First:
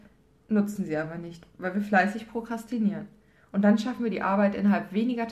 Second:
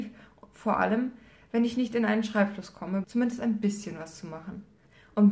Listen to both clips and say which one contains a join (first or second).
second